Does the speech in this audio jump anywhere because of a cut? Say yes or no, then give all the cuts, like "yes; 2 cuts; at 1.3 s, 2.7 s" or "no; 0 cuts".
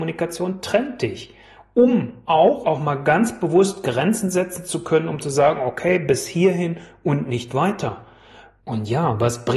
yes; 2 cuts; at 2.6 s, 8.6 s